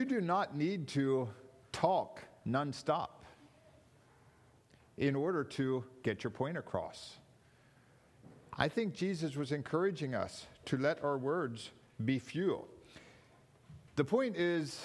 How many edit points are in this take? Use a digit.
1